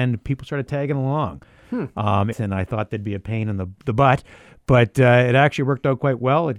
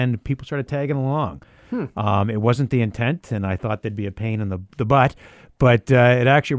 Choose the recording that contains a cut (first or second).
first